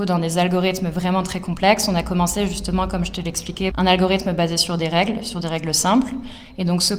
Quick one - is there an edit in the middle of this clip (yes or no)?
yes